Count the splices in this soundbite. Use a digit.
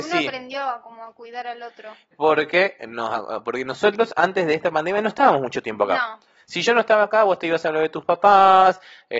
1